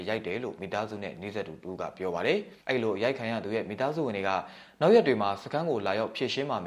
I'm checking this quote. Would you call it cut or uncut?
cut